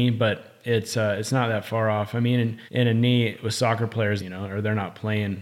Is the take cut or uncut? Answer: cut